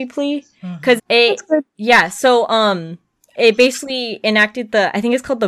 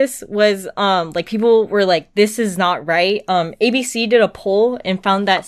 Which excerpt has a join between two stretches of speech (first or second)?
first